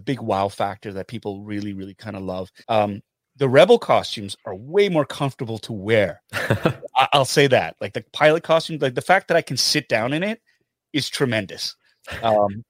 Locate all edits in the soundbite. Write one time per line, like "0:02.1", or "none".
0:02.6